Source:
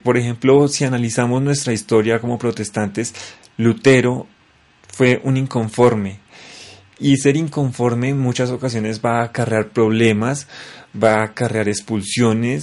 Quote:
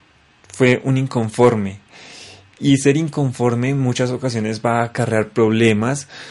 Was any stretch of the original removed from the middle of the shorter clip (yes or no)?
no